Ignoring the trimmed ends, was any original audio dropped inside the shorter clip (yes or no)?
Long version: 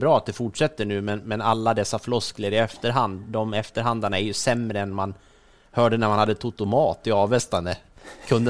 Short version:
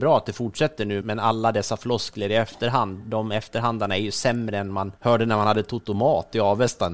yes